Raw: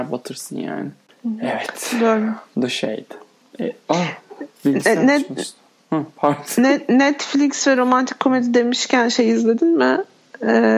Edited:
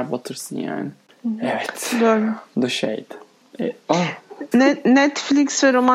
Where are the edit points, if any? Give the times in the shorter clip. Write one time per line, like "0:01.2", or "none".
0:04.5